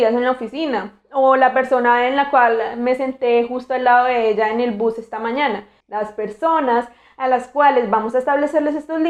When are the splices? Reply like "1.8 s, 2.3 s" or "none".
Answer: 5.8 s